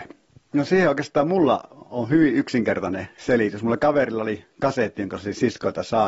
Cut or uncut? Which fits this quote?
cut